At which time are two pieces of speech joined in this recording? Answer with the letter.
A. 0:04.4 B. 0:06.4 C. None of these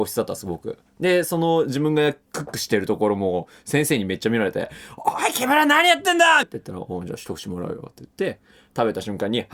B